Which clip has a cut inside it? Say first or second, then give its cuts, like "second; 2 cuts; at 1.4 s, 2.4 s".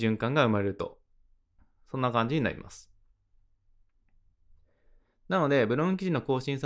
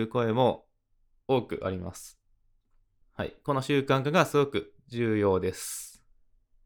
second; 1 cut; at 3.0 s